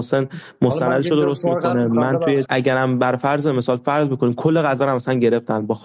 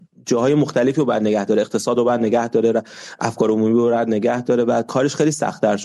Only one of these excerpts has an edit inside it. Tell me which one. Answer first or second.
first